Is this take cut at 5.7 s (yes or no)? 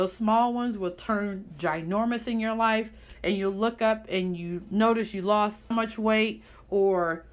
yes